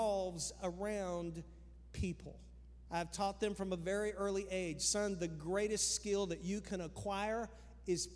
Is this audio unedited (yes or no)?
no